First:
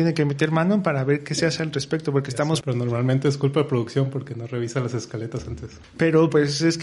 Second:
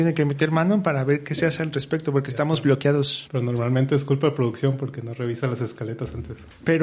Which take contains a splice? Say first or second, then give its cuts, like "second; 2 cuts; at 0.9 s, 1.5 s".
first; 1 cut; at 2.6 s